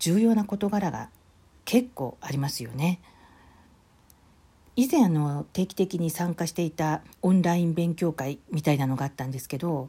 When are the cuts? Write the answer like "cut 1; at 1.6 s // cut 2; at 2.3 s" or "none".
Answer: cut 1; at 7.1 s